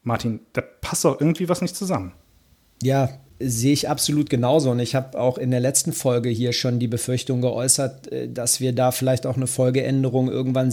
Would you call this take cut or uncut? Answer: uncut